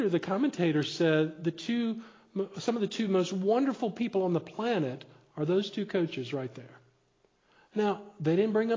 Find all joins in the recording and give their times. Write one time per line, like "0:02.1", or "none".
none